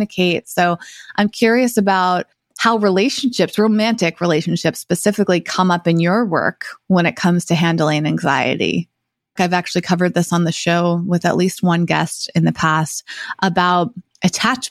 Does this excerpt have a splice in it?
yes; 1 cut; at 9.4 s

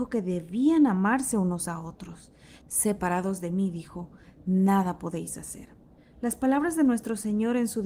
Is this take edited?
yes; 1 cut; at 2.6 s

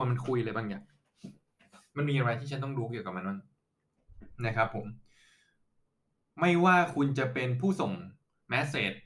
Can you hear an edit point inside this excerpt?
no; 0 cuts

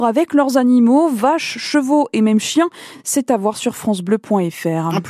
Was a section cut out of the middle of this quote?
no; 0 cuts

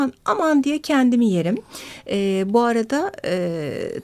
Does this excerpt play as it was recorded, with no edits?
yes; 0 cuts

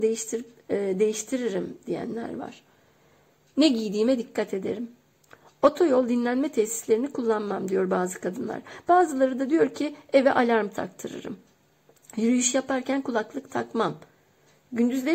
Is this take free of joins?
yes; 0 cuts

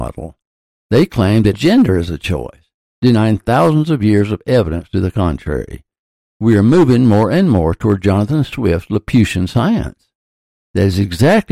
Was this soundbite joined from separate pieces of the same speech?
yes; 2 cuts; at 1.5 s, 10.5 s

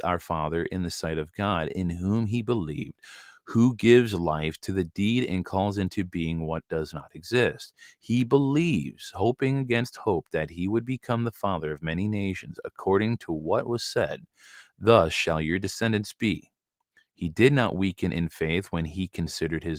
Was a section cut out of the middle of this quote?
no; 0 cuts

